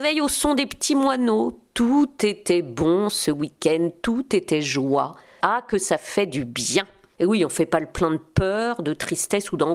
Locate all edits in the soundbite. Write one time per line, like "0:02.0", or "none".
0:05.4
0:07.2